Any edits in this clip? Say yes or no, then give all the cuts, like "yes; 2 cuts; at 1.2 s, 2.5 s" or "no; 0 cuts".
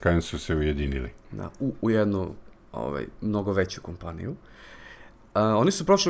no; 0 cuts